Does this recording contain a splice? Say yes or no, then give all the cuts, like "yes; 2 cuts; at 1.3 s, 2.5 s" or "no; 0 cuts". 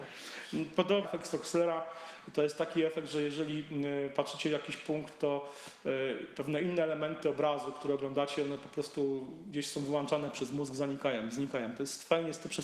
yes; 1 cut; at 1.0 s